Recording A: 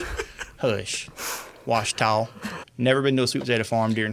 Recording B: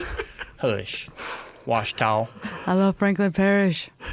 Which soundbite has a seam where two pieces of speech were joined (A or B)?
A